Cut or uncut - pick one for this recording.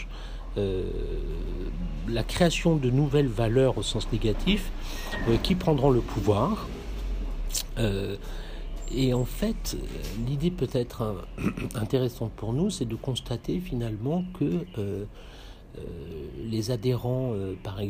uncut